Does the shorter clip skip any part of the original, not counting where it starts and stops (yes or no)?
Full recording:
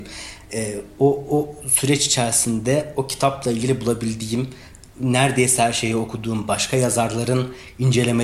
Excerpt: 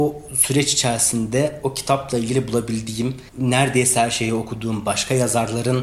yes